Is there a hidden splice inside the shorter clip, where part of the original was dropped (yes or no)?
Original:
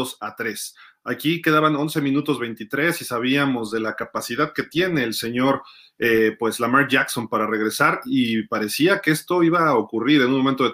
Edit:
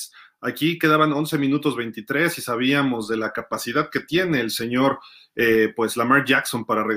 no